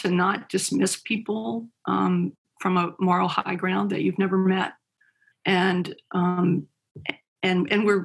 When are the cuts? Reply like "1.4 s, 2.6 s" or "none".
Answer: 5.3 s